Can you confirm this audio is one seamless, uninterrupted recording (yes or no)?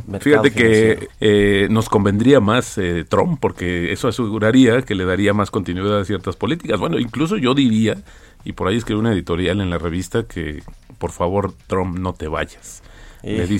no